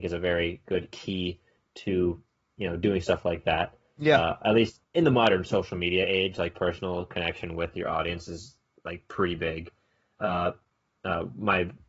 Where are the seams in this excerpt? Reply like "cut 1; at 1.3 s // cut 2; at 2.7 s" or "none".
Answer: none